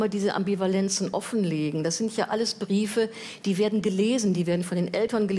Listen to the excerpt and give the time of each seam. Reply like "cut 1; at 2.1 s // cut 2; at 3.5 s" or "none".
none